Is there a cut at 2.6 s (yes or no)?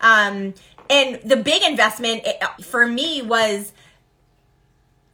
yes